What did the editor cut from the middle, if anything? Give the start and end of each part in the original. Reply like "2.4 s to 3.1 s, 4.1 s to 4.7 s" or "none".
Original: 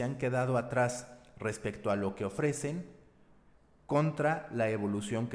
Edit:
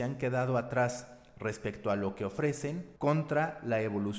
3.0 s to 3.8 s

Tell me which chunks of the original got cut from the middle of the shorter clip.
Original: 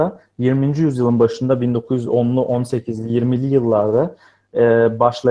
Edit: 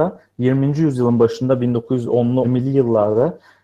2.4 s to 3.2 s

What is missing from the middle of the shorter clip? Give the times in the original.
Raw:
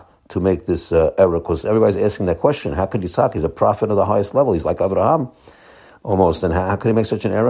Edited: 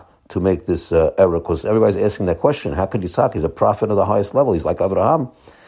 none

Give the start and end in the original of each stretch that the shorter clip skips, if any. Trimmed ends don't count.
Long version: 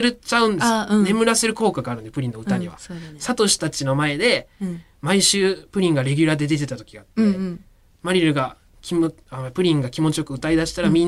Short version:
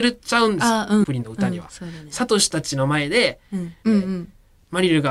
1.0 s to 2.1 s, 4.9 s to 7.1 s

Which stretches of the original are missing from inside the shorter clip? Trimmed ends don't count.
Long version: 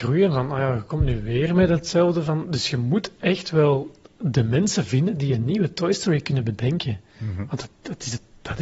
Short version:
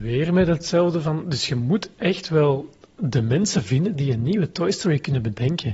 none

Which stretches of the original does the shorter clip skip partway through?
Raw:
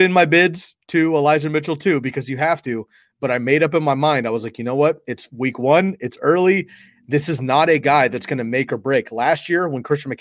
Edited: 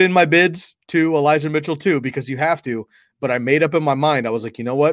none

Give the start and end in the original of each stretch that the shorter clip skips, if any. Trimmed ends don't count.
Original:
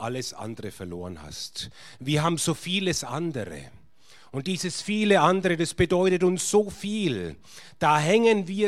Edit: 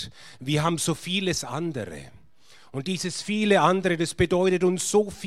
none

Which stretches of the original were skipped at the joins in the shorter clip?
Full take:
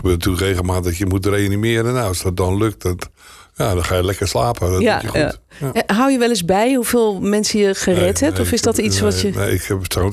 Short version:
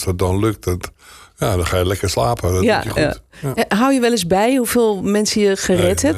none

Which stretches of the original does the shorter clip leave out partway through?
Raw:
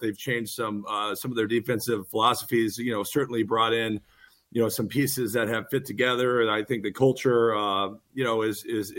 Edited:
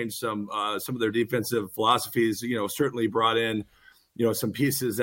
none

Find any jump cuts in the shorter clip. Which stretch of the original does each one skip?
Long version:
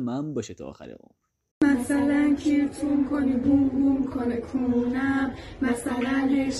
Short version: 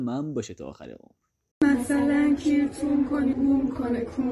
3.3 s to 3.7 s

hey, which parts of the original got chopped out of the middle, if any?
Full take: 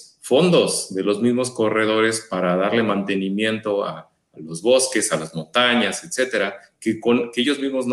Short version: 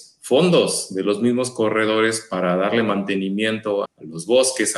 3.8 s to 4.2 s

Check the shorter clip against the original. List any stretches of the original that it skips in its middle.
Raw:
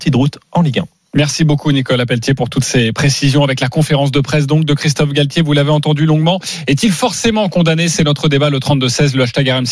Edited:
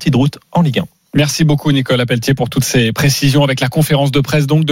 none

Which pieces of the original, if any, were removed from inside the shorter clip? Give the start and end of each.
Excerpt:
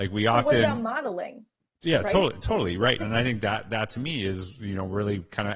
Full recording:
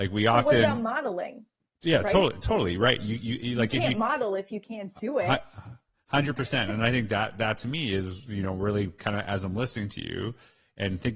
3.0 s to 6.7 s

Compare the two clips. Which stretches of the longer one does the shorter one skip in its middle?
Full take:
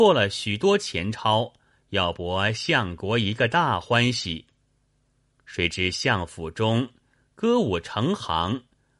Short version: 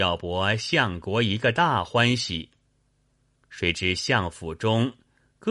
none

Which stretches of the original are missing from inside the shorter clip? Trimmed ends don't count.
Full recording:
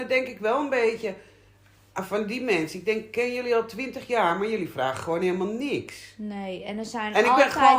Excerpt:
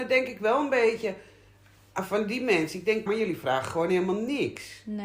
3.1 s to 4.4 s

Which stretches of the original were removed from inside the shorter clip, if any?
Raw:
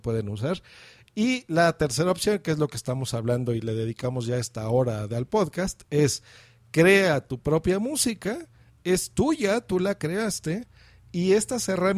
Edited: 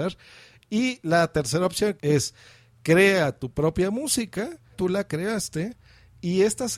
2.4 s to 5.8 s, 8.6 s to 9.6 s

